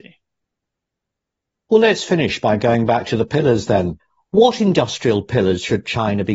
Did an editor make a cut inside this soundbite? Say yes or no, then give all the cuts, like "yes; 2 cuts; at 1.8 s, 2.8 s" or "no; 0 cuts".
no; 0 cuts